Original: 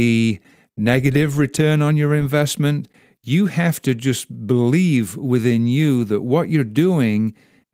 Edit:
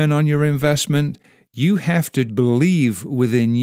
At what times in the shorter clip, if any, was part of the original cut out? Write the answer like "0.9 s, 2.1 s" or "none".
2.3 s